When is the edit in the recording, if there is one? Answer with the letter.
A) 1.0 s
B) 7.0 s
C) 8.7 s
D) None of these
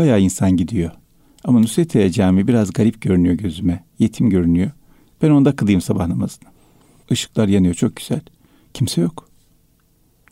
B